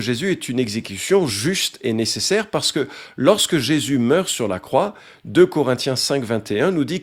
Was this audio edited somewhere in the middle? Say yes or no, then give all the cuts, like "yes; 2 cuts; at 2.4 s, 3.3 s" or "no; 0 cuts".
no; 0 cuts